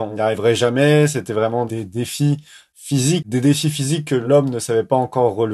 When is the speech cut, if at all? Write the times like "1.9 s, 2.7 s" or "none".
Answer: 3.2 s